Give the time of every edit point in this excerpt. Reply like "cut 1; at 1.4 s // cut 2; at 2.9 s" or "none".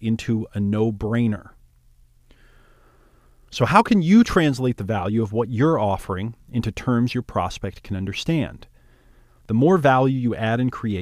cut 1; at 9.4 s